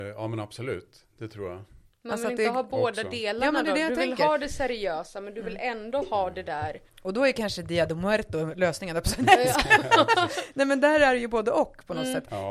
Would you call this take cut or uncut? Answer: cut